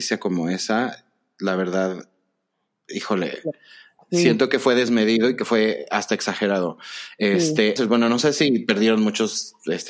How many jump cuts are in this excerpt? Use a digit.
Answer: 1